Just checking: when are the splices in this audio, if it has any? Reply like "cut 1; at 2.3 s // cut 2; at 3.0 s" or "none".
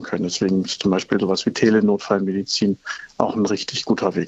none